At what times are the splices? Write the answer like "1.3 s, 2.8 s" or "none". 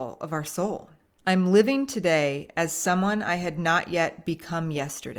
1.2 s

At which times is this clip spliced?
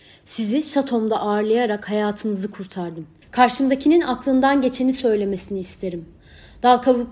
3.2 s

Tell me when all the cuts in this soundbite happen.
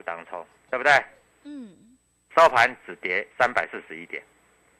1.3 s, 3.3 s

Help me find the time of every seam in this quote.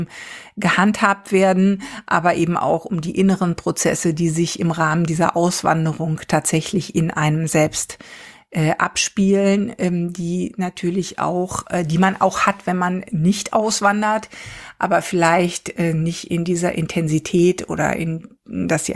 none

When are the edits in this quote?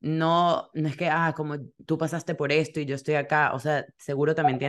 none

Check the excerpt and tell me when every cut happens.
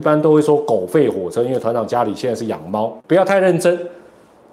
3.0 s

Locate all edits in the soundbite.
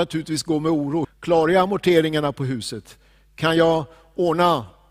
1.0 s

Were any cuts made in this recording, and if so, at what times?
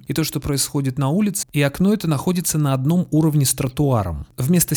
1.4 s

